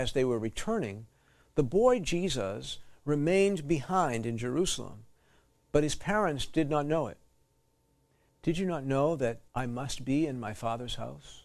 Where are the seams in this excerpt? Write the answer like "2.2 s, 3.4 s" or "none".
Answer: 8.3 s, 9.5 s